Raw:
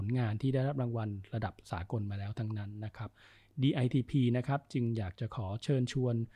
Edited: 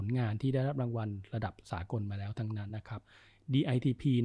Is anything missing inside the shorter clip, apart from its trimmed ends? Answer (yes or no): yes